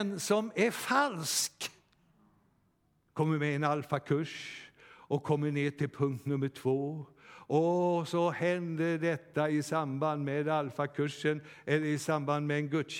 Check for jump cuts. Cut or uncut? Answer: cut